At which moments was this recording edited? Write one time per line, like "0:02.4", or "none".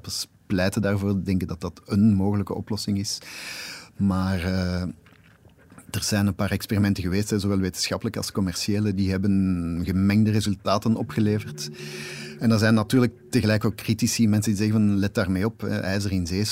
none